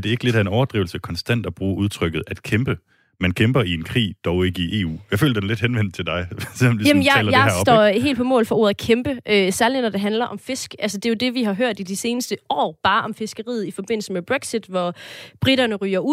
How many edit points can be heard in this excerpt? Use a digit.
0